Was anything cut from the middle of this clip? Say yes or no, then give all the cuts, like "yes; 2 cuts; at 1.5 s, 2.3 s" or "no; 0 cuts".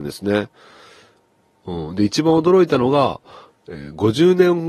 yes; 1 cut; at 1.5 s